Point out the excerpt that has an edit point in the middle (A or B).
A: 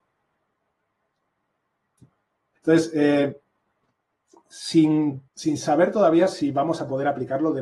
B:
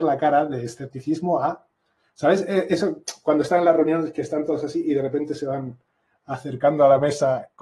A